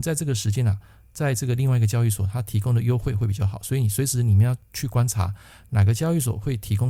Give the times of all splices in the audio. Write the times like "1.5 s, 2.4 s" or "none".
none